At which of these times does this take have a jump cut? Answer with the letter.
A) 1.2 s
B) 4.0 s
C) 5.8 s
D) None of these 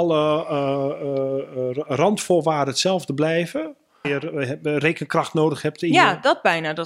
B